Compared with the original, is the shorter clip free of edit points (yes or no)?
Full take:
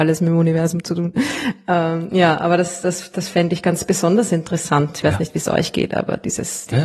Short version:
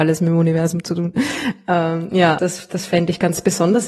no